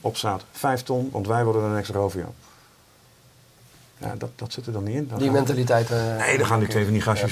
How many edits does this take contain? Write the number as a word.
zero